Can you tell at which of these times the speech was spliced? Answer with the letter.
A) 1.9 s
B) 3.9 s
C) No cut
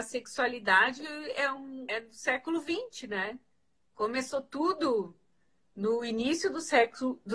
A